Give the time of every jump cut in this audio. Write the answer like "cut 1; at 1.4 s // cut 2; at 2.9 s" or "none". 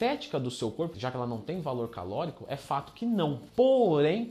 cut 1; at 0.9 s